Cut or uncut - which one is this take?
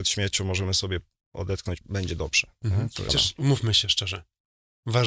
cut